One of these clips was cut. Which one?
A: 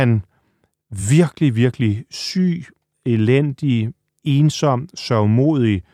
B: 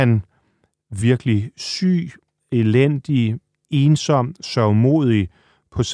B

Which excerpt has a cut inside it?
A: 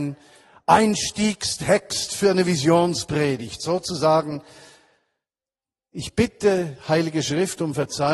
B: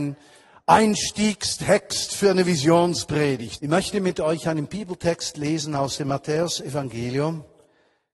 B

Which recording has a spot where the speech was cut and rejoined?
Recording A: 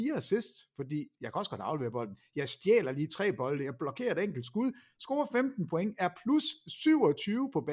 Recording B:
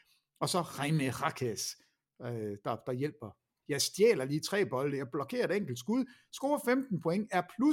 B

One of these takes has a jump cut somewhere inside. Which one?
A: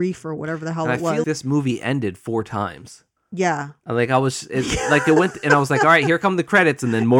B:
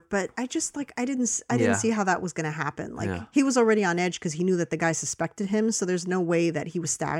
A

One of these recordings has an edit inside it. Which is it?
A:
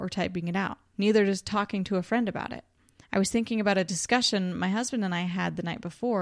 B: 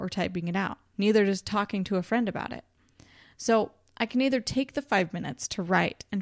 A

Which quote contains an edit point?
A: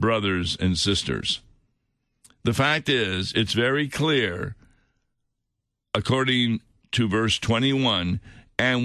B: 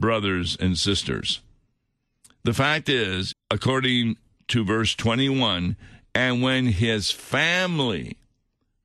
B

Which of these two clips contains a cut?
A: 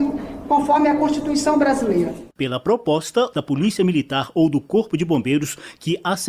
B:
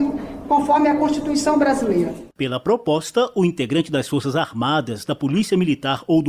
A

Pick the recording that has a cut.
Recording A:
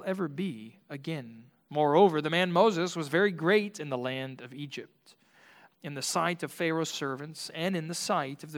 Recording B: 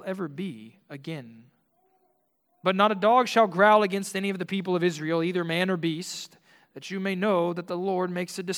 A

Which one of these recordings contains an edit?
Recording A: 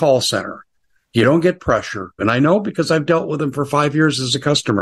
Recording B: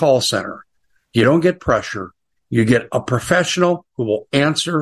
A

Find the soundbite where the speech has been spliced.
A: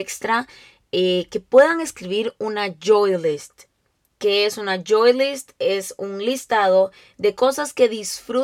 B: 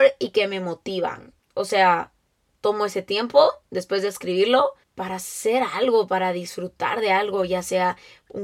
B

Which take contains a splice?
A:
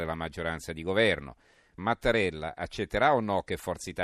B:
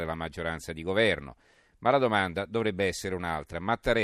A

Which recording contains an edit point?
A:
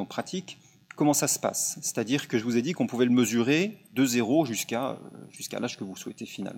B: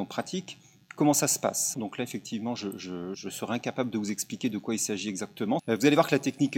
B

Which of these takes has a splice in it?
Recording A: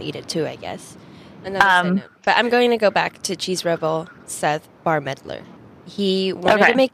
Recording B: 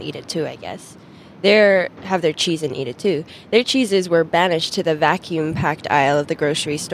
A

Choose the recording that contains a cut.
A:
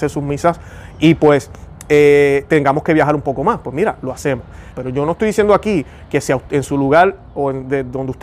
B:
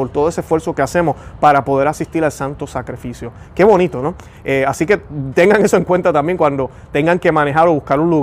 A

